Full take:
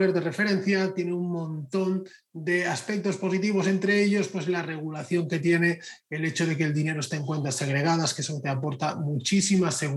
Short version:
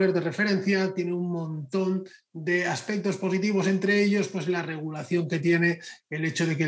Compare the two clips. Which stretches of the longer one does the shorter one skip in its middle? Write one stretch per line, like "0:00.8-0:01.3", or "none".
none